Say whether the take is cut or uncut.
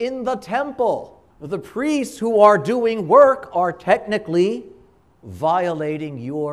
cut